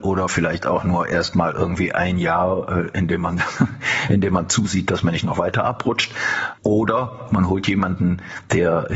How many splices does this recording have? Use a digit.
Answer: 1